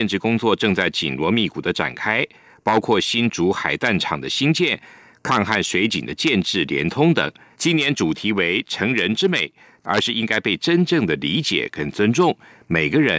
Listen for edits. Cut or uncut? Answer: cut